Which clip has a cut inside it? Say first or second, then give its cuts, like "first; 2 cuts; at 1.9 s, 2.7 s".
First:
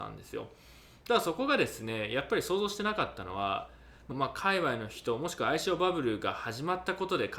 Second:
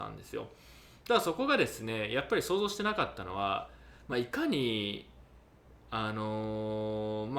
first; 1 cut; at 4.1 s